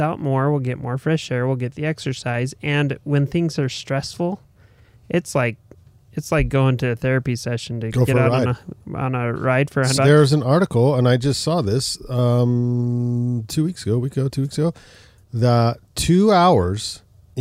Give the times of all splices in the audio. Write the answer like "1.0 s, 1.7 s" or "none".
10.0 s